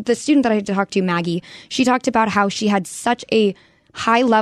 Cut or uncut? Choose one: uncut